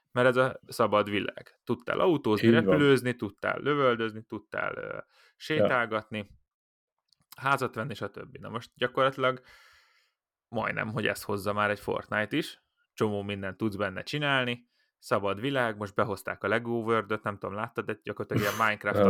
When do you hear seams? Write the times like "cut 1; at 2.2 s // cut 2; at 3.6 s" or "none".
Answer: none